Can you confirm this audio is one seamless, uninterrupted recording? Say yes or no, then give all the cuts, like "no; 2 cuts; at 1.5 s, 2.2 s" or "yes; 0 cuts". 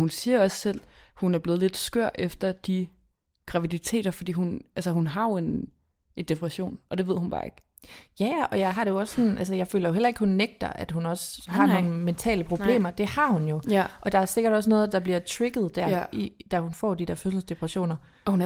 yes; 0 cuts